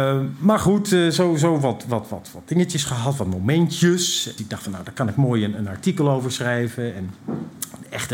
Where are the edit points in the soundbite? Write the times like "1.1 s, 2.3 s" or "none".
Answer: 4.4 s

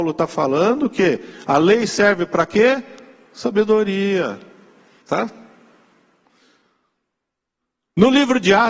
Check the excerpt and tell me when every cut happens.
5.0 s

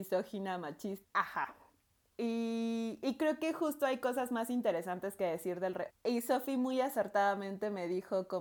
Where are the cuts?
1.0 s, 5.9 s

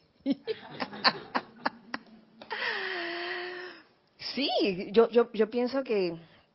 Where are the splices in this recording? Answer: none

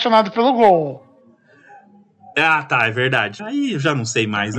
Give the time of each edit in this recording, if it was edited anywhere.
3.4 s

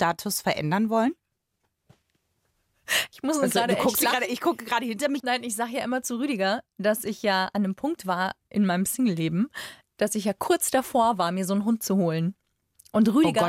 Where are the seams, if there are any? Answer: 5.2 s

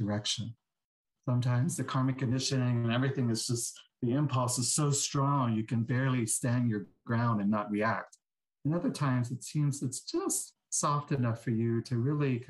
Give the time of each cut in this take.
1.1 s

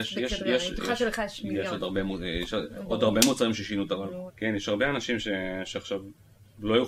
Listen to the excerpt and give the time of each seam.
4.3 s

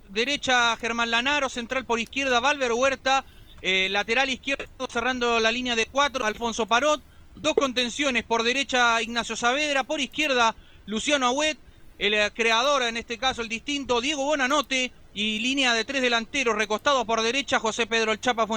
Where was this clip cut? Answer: none

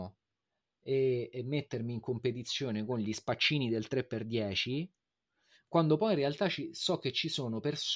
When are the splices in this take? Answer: none

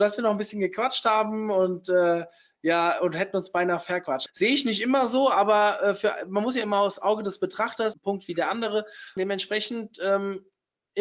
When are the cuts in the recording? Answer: 4.3 s, 7.9 s, 9.2 s

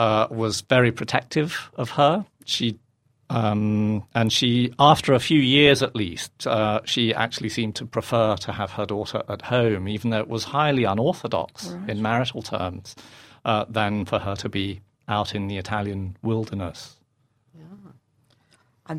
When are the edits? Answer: none

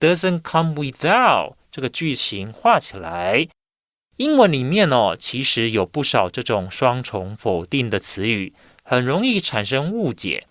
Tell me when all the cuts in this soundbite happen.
none

